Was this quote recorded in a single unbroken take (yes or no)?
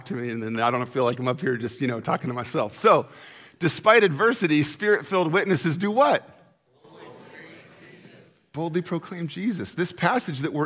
yes